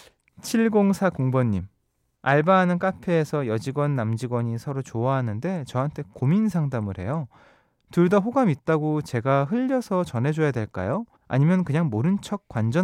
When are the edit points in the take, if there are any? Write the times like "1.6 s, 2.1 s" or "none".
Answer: 11.2 s

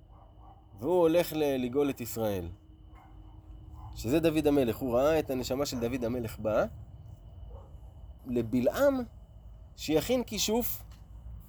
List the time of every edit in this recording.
8.2 s

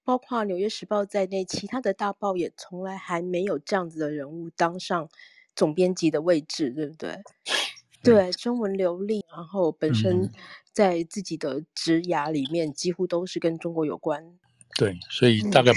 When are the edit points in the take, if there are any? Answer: 8.0 s, 9.2 s

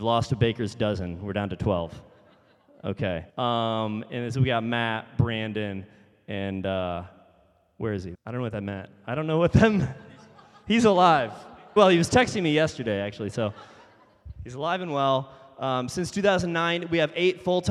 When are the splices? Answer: 3.3 s, 8.1 s, 11.8 s

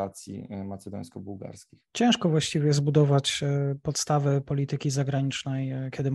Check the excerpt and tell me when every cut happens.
none

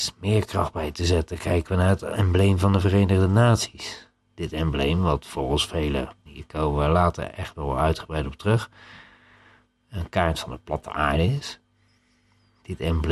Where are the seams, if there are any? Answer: 6.3 s

